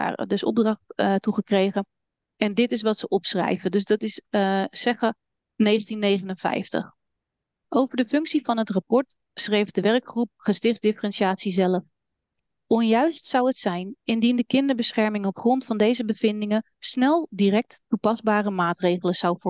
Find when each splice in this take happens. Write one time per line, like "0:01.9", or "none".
none